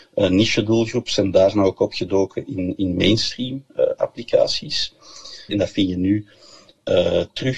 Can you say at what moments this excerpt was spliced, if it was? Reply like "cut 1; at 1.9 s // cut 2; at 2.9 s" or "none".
cut 1; at 5.5 s

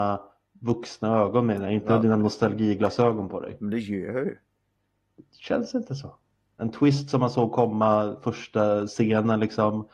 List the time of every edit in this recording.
cut 1; at 6.6 s

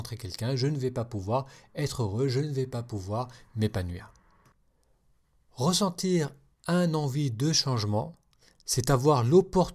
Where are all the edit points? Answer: none

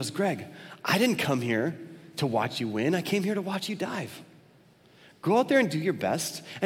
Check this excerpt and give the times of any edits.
none

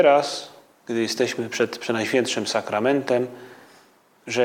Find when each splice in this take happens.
none

